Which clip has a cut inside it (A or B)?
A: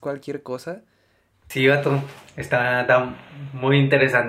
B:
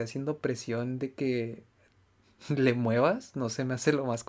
A